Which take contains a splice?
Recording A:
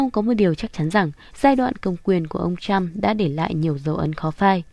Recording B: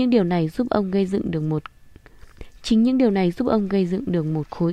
A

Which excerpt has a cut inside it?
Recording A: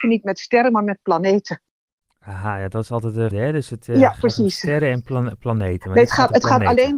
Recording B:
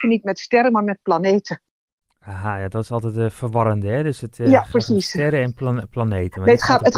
A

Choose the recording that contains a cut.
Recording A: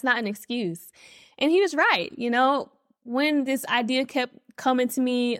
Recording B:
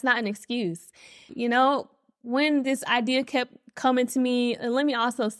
B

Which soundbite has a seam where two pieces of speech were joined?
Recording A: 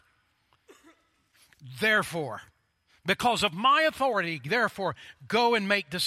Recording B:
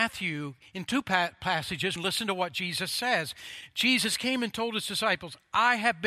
B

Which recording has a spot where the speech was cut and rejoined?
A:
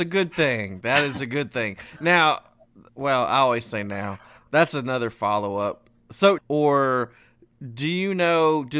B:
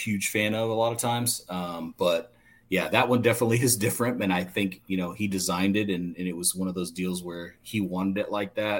A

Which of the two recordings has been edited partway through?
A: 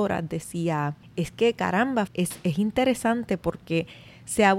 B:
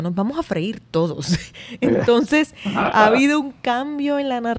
A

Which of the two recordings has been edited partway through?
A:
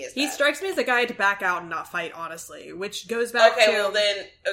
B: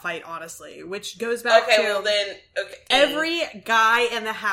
B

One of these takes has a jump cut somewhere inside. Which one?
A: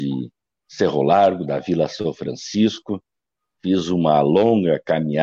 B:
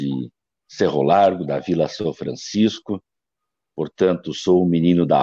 A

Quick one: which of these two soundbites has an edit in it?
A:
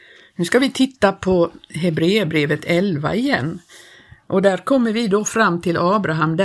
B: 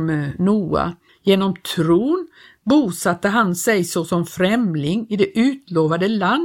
B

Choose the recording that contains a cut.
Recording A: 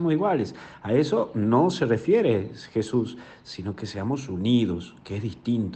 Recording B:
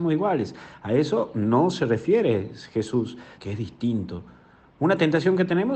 B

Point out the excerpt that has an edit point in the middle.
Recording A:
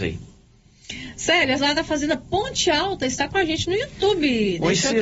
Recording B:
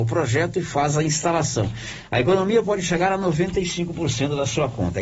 A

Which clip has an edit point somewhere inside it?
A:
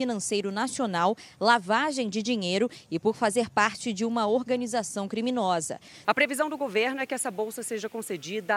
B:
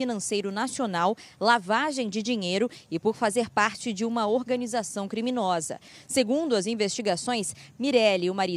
A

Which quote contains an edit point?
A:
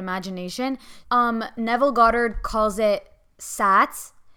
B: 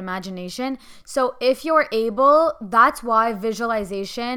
A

